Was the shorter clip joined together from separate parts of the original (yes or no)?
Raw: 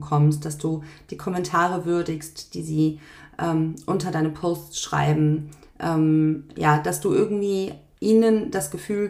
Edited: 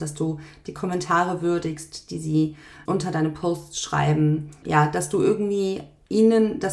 yes